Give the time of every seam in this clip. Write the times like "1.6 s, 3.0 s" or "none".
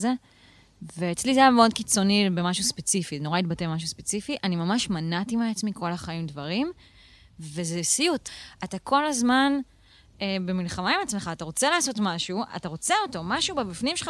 none